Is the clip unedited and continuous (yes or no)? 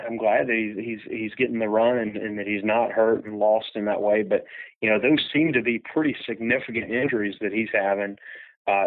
yes